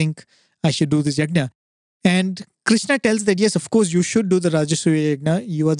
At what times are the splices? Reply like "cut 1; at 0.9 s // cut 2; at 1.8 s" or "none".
none